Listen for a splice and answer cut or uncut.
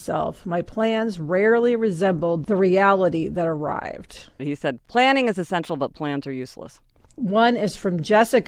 cut